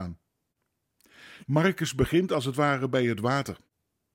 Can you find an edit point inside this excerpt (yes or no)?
yes